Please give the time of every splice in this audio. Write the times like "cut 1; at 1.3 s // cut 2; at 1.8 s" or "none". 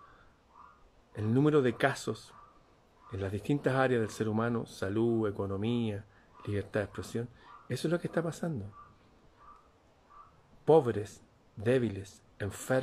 none